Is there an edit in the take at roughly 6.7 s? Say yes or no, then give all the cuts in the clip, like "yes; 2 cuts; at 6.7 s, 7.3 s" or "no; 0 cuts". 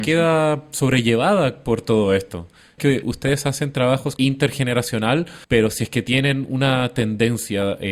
no; 3 cuts; at 2.8 s, 4.2 s, 5.4 s